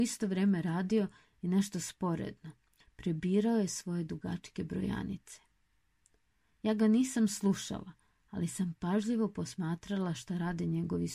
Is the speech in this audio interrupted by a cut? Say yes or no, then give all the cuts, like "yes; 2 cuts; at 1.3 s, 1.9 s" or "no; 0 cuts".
no; 0 cuts